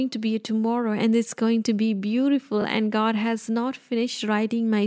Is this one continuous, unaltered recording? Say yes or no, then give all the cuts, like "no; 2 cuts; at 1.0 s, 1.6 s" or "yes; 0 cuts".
yes; 0 cuts